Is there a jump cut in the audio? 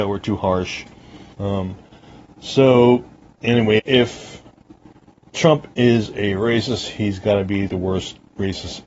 yes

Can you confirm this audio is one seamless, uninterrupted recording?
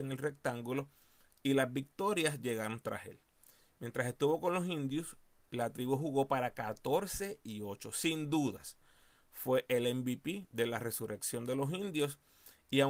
yes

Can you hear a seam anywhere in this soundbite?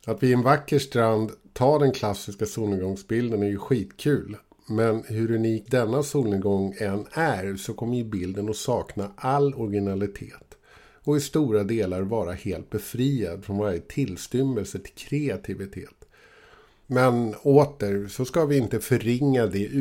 yes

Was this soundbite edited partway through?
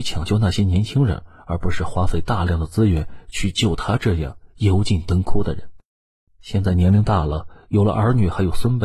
yes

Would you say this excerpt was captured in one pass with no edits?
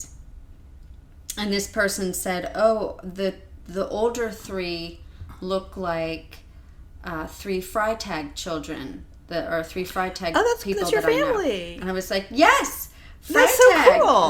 yes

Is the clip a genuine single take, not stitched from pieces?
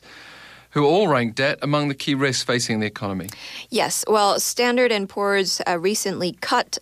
yes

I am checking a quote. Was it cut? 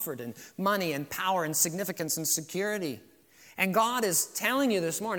no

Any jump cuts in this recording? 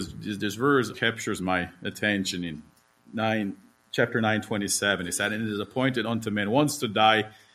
yes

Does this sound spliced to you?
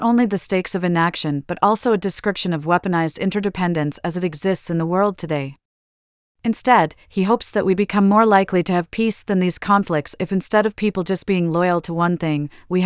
no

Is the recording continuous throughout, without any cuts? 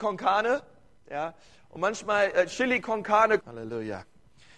no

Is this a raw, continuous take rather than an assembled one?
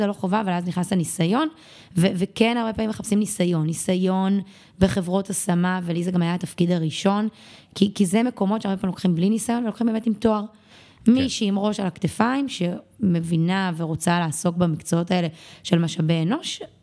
yes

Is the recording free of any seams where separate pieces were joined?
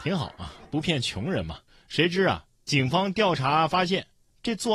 no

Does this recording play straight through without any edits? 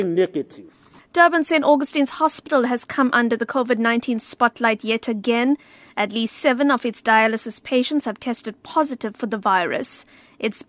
yes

